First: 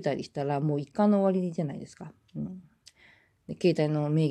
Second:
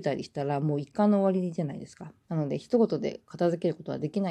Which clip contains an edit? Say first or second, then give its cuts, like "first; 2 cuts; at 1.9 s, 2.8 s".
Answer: second; 1 cut; at 2.2 s